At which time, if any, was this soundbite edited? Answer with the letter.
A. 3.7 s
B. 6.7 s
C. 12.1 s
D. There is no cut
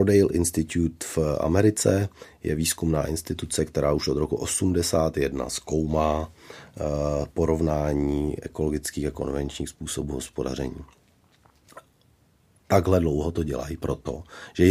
D